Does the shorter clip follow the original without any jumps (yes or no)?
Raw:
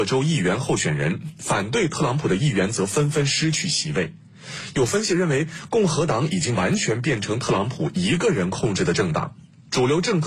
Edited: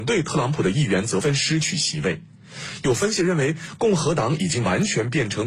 no